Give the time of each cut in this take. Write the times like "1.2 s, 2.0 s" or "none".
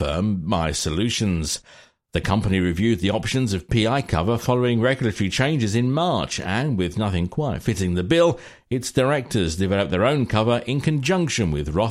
none

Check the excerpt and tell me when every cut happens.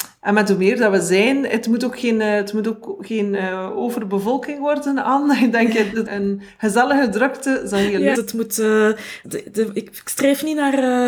6.1 s, 8.1 s, 9.2 s

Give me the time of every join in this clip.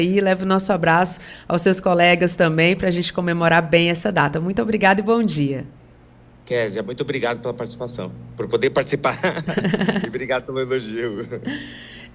none

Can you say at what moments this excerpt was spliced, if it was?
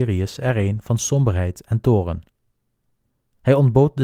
none

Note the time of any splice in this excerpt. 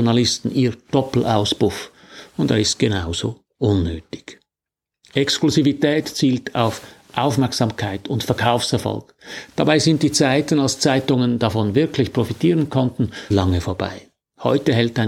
13.3 s

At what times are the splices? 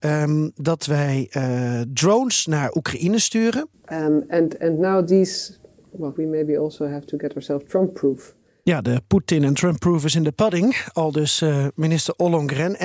3.7 s, 6.1 s

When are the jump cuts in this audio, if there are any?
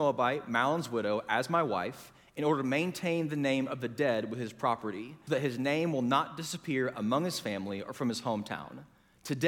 5.3 s

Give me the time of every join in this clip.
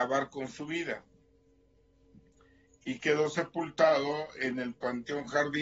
none

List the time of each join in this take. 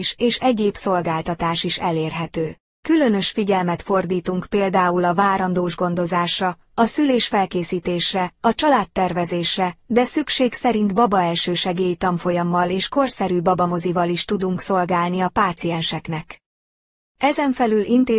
none

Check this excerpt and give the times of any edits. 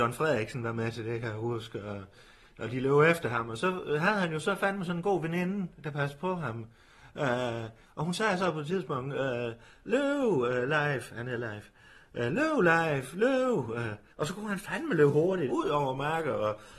14.1 s, 15.5 s

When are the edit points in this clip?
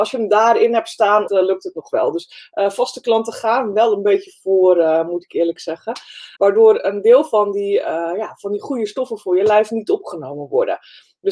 1.3 s, 6.4 s

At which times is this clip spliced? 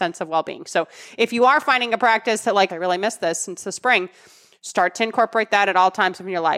2.7 s

